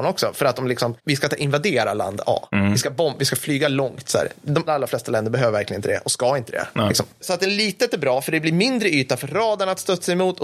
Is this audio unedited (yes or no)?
no